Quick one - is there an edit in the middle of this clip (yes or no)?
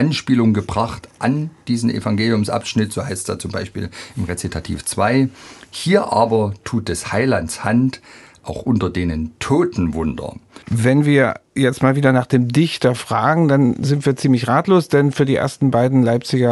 yes